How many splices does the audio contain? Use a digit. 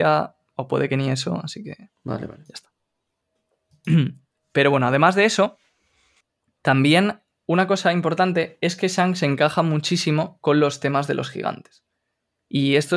0